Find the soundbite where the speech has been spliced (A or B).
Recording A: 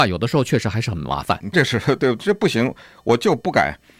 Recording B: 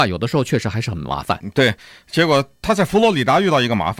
A